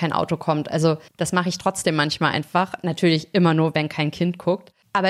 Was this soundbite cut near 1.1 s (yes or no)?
yes